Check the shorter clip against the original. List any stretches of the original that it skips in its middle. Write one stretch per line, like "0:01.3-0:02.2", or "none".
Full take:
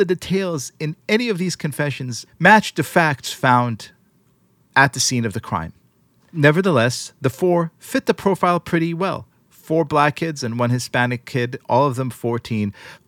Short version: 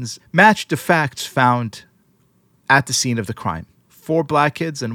0:05.9-0:09.5